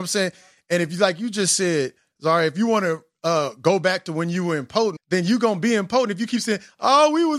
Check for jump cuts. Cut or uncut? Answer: cut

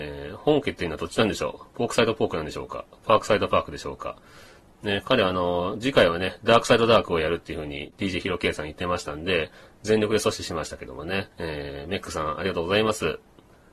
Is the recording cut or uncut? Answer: cut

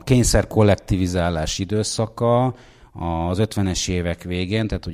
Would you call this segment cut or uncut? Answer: uncut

